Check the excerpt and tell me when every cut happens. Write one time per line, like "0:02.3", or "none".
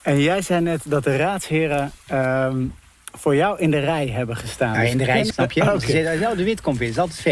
0:05.3